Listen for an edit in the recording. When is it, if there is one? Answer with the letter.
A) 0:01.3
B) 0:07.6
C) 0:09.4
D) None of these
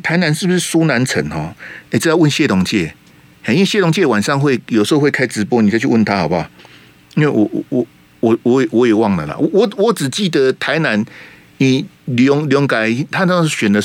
D